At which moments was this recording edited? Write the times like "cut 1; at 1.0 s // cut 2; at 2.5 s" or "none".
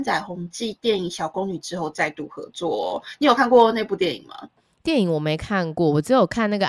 none